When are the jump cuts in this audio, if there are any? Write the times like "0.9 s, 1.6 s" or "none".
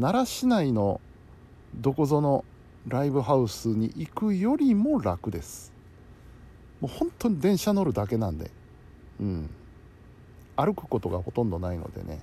1.6 s